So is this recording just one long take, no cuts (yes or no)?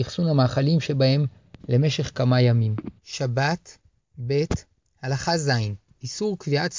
no